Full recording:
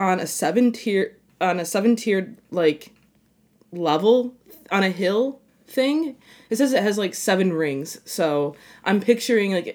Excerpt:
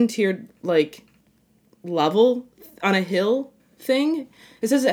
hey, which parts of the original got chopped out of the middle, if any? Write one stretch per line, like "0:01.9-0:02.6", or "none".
none